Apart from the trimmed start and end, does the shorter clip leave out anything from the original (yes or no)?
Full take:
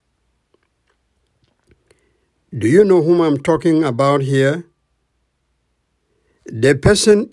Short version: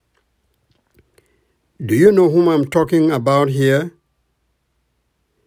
no